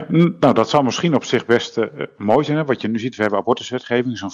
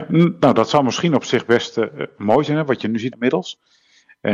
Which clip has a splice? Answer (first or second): second